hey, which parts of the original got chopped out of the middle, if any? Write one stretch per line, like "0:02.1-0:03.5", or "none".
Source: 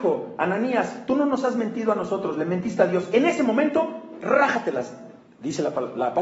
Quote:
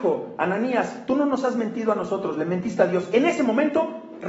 none